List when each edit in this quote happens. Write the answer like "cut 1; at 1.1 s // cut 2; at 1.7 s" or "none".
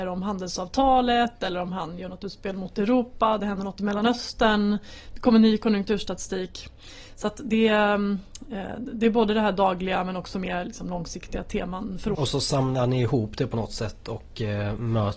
cut 1; at 12.1 s

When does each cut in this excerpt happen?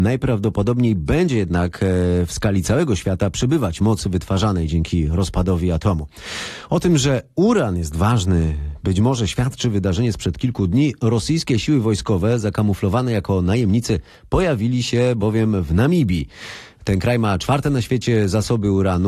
none

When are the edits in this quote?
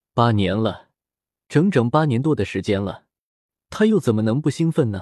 cut 1; at 3.6 s

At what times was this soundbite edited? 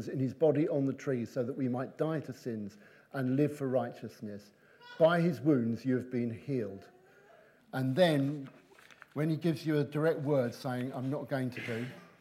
cut 1; at 7.6 s

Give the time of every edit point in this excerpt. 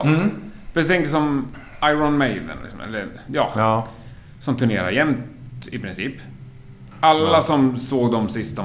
none

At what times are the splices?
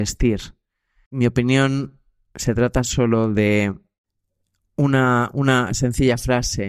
cut 1; at 1.1 s

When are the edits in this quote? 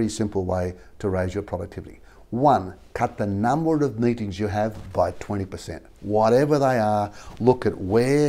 none

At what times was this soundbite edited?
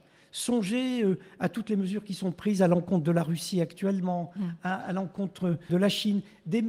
cut 1; at 5.7 s

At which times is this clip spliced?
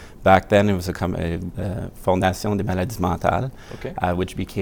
cut 1; at 1.5 s

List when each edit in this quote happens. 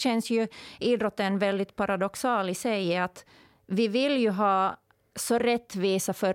none

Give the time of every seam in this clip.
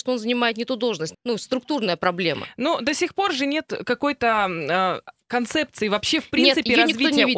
cut 1; at 1.1 s

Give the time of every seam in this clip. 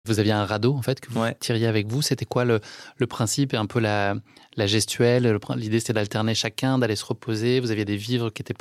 none

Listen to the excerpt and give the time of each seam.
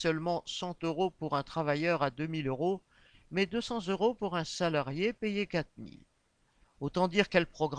cut 1; at 6.6 s

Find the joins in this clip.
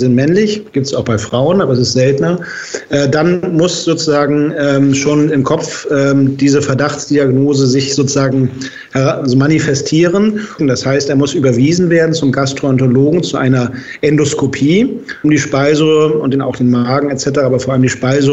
cut 1; at 10.6 s // cut 2; at 15.2 s

